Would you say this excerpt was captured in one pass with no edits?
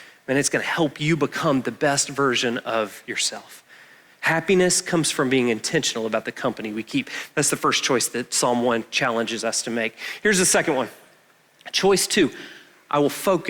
yes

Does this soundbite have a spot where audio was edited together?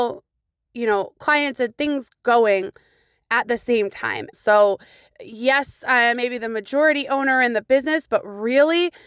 yes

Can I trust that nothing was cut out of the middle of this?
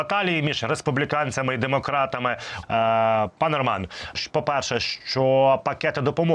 no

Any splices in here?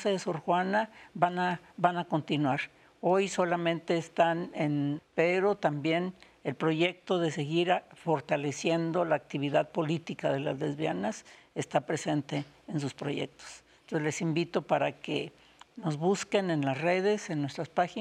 yes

